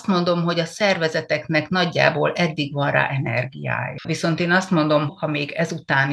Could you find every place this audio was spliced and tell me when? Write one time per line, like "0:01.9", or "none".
0:04.0
0:05.1